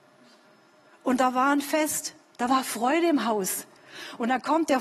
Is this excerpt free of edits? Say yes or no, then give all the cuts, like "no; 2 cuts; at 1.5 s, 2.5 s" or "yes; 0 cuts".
yes; 0 cuts